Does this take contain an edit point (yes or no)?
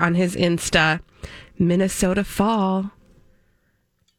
no